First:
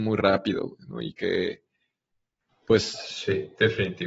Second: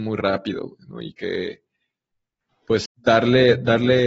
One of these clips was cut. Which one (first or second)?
second